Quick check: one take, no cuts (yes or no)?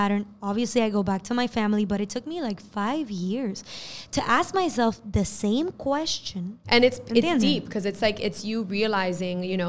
no